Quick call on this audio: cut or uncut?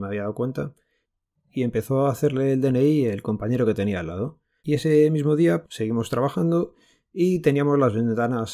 cut